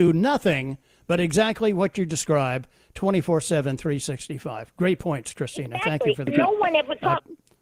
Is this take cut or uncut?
uncut